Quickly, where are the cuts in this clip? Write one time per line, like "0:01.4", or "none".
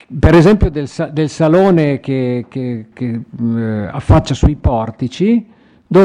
0:02.9